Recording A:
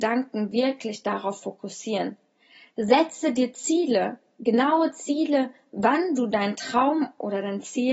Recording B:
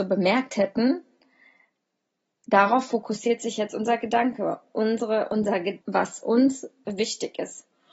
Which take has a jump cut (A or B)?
B